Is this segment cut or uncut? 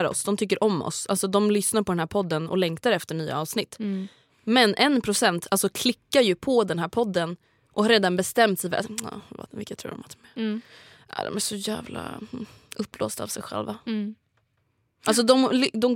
uncut